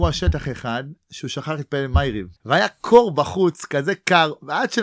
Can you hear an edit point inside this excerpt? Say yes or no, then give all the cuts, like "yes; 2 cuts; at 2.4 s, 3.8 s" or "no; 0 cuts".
yes; 1 cut; at 2.4 s